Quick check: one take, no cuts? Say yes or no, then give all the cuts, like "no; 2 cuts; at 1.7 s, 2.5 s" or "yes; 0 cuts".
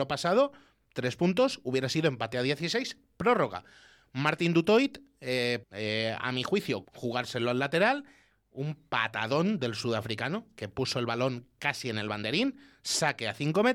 no; 2 cuts; at 5.6 s, 6.8 s